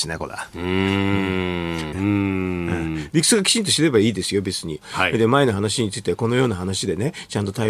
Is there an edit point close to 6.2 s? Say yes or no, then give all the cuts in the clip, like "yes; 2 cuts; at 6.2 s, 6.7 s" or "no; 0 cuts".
no; 2 cuts; at 1.9 s, 4.8 s